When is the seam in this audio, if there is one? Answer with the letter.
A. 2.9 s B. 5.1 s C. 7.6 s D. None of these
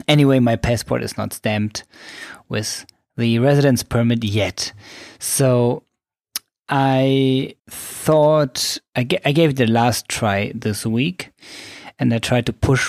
C